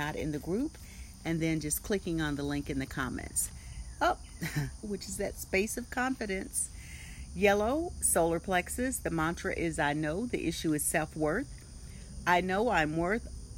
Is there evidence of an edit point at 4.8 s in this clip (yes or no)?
yes